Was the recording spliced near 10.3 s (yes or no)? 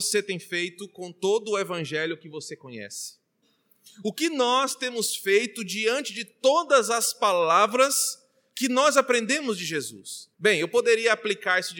yes